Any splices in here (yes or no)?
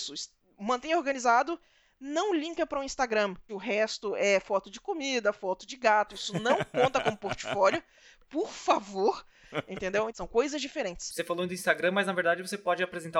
yes